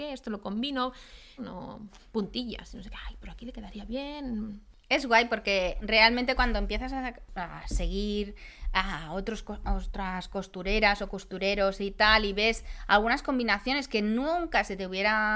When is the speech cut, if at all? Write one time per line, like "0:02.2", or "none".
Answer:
0:01.4